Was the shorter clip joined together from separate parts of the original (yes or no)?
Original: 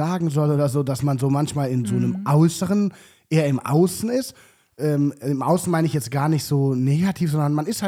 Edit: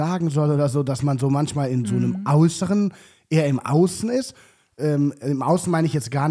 no